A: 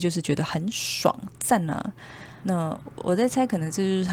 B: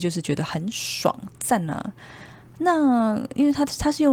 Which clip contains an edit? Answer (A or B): A